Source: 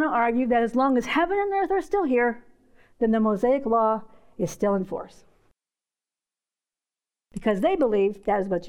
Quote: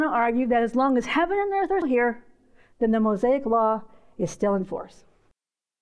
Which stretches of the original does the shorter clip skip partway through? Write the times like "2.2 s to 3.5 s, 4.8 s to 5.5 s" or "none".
1.8 s to 2.0 s